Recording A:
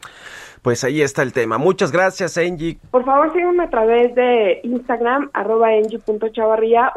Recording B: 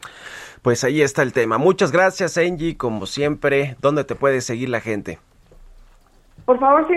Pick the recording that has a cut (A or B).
A